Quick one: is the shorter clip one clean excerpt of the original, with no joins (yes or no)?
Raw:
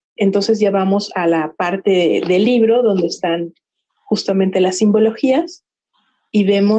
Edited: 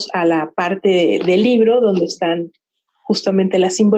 yes